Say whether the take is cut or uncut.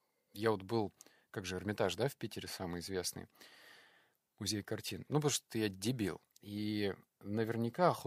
cut